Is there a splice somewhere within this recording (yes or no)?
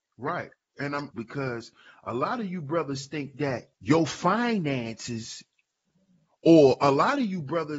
yes